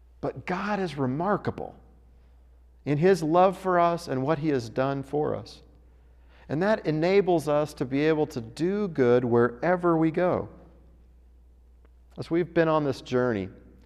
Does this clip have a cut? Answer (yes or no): no